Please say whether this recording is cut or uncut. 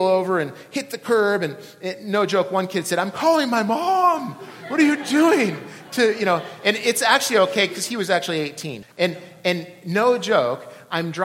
cut